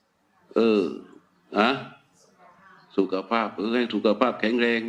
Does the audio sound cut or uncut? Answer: uncut